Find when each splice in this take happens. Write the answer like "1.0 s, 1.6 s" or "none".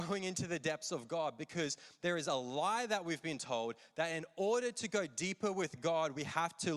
none